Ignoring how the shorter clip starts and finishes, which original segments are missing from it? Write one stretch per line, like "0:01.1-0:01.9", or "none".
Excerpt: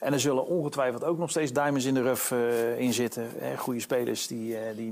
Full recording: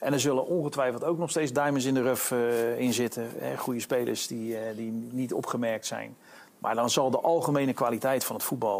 none